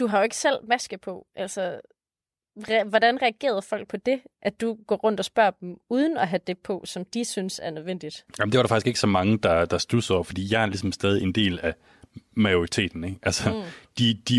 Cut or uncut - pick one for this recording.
uncut